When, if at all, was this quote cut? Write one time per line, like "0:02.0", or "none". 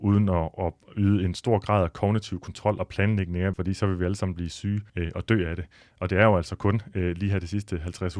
0:03.5
0:04.9